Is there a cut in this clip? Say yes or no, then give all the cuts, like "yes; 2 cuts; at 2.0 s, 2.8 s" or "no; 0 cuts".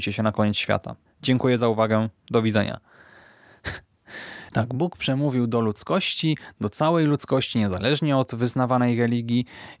yes; 1 cut; at 1.1 s